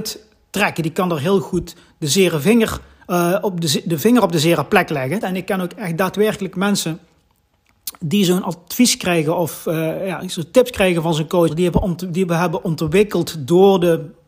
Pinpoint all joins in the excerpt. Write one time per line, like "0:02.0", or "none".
0:05.2
0:11.5